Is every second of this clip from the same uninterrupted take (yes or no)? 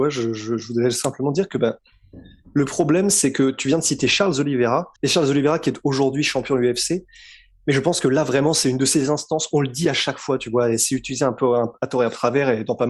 no